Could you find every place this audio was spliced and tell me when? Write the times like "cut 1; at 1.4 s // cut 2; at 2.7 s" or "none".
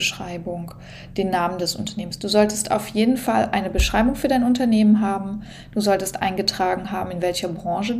none